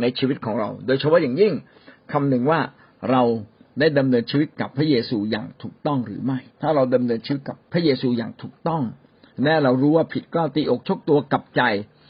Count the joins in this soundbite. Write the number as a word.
two